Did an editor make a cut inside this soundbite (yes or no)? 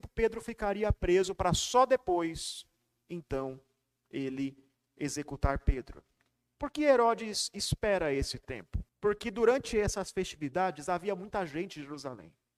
yes